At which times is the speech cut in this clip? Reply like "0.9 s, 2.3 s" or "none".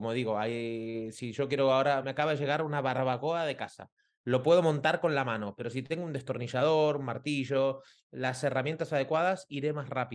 2.0 s